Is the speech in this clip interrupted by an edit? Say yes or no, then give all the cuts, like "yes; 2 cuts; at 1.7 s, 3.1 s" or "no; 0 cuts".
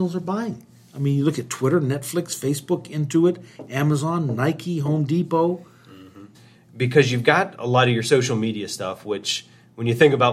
yes; 1 cut; at 6.3 s